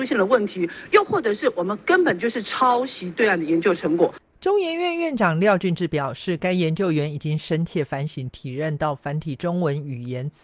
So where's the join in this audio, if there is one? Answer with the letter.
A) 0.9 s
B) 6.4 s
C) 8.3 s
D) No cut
C